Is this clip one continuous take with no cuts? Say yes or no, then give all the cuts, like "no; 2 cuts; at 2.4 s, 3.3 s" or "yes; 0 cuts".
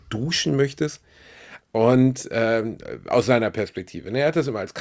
no; 1 cut; at 1.6 s